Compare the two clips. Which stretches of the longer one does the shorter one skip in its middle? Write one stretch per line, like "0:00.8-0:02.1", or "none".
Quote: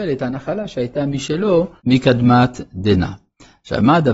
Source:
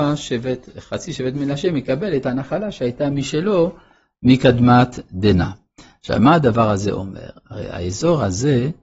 0:03.8-0:04.2

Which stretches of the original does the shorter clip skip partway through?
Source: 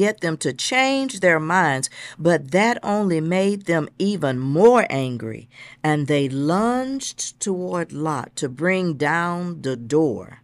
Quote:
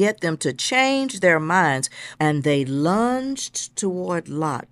0:02.1-0:05.8

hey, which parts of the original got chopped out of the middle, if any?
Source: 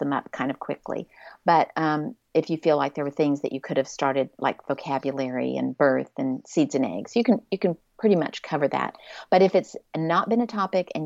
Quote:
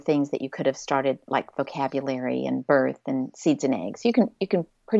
none

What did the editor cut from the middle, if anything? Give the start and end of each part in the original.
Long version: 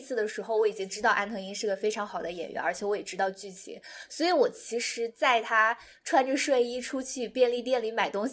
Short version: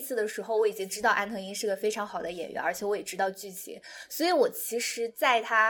none

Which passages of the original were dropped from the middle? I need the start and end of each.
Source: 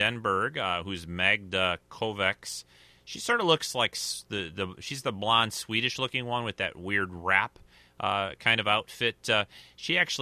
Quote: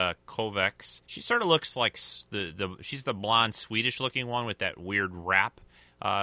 0:02.7-0:03.0

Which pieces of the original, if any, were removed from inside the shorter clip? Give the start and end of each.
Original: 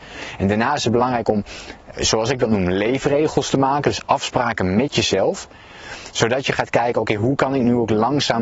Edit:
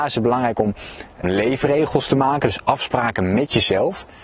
0:01.9-0:02.7

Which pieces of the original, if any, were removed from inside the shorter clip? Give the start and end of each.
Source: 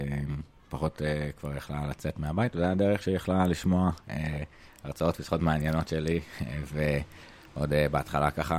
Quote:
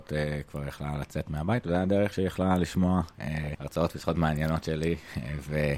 0:04.4-0:04.8

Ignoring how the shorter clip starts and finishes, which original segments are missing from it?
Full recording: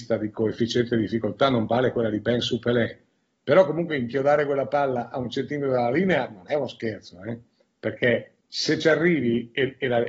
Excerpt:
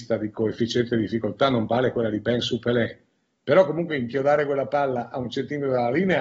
none

